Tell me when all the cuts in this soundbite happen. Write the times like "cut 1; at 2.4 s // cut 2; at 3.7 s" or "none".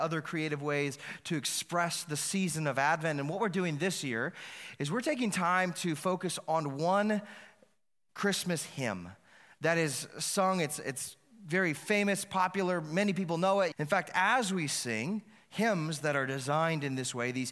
cut 1; at 13.7 s

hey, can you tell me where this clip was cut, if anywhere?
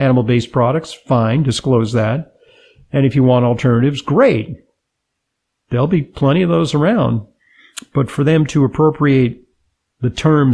none

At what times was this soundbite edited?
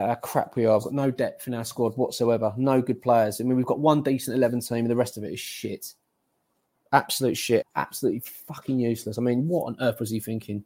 cut 1; at 7.6 s

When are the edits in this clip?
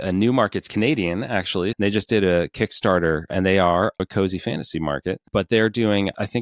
cut 1; at 1.7 s // cut 2; at 4.0 s

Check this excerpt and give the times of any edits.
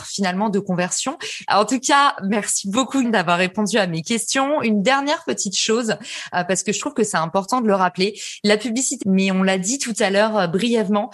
cut 1; at 1.5 s // cut 2; at 3.0 s // cut 3; at 9.0 s

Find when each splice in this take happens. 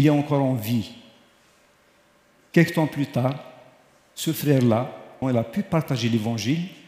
cut 1; at 5.2 s

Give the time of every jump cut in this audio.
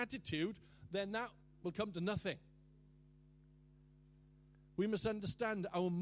none

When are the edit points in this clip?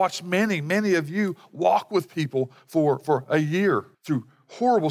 cut 1; at 3.9 s

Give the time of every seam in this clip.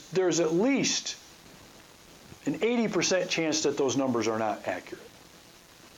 cut 1; at 2.4 s

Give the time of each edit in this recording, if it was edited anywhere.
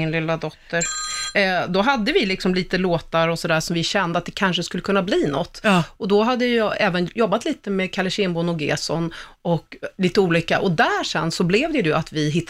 none

